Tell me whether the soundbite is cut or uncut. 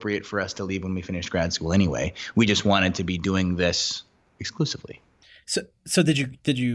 uncut